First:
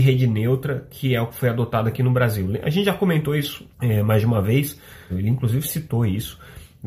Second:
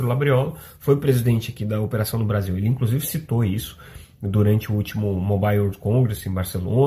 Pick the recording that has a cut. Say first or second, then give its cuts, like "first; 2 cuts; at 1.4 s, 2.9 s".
first; 2 cuts; at 3.7 s, 5.1 s